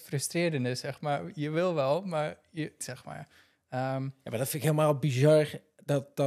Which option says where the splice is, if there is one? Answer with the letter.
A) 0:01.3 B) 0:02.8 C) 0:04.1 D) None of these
B